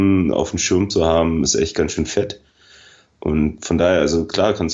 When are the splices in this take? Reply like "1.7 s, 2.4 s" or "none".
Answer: none